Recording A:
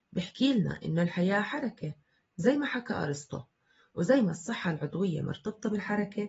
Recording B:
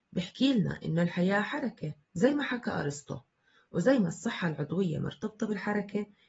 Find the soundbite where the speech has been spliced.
B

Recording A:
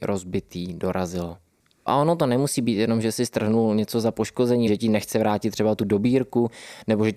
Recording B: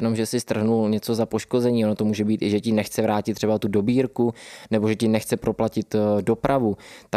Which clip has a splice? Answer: A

